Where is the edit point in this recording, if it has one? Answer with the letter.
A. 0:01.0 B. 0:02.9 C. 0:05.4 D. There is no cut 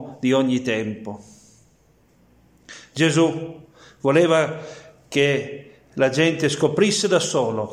D